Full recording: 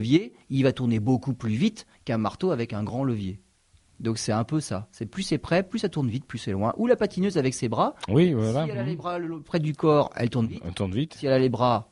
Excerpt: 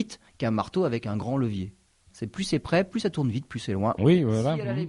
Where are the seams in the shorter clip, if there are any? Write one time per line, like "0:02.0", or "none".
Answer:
0:02.1
0:04.0